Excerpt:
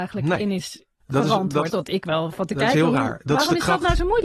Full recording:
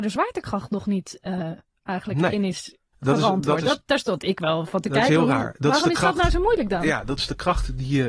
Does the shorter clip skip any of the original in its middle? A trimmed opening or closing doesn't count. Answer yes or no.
yes